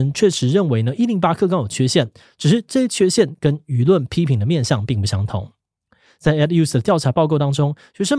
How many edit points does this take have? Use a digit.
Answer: 0